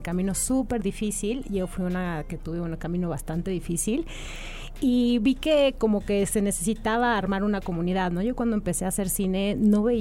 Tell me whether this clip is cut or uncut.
uncut